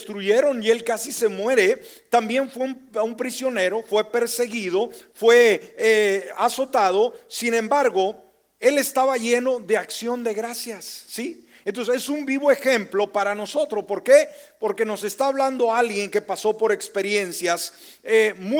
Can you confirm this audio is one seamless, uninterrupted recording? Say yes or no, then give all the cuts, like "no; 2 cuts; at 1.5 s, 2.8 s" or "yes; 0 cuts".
yes; 0 cuts